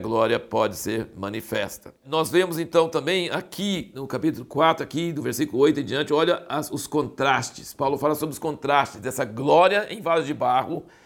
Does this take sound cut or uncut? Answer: uncut